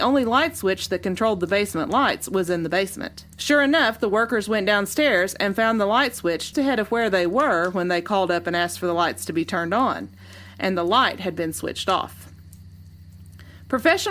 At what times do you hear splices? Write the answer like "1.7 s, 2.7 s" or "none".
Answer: 3.3 s, 6.5 s